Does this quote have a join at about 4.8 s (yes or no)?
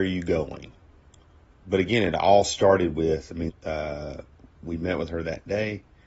no